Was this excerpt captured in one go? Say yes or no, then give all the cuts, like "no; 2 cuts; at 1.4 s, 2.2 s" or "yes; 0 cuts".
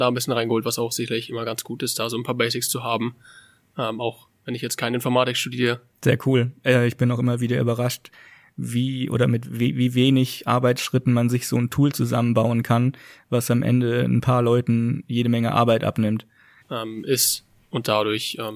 no; 2 cuts; at 5.9 s, 16.6 s